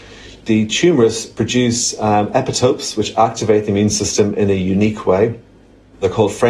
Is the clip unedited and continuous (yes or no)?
yes